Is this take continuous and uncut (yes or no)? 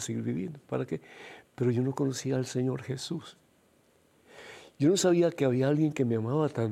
no